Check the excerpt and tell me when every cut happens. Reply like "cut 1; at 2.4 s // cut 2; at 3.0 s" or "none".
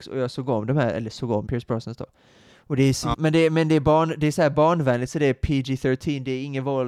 cut 1; at 1.5 s // cut 2; at 3.1 s